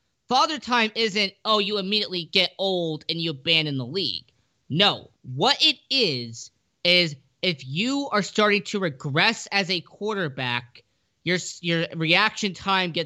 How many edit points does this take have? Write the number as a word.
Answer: one